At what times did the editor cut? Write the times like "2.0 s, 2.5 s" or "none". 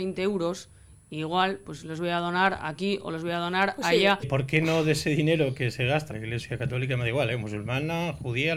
4.2 s, 6.1 s